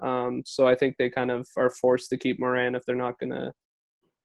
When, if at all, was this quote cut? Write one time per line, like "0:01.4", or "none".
none